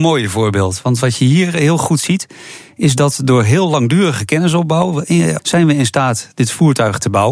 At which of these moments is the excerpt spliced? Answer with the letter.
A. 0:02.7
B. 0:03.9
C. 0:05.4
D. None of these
C